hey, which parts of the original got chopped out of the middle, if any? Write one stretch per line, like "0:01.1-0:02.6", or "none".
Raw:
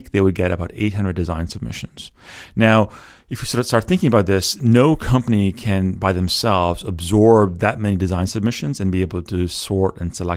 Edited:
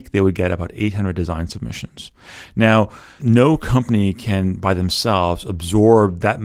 0:03.2-0:04.6